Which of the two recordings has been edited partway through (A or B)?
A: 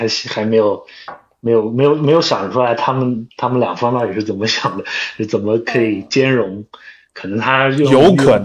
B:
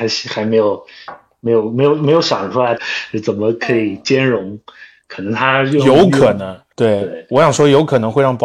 B